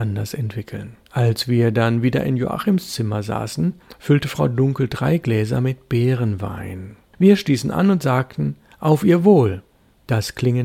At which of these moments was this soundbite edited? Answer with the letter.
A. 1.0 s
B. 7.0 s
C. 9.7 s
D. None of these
A